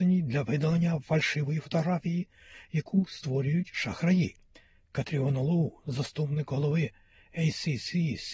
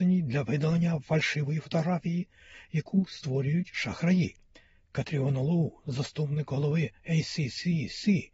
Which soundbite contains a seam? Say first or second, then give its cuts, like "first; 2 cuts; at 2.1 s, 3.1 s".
second; 1 cut; at 7.0 s